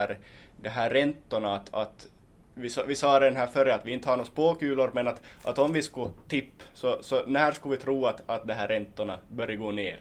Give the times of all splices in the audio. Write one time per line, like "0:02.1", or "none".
none